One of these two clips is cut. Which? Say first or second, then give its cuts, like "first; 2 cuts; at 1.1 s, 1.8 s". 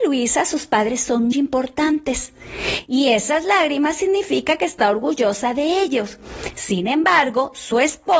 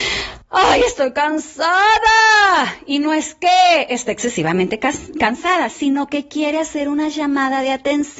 first; 1 cut; at 1.3 s